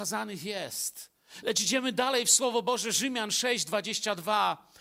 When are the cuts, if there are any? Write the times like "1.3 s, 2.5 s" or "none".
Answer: 1.4 s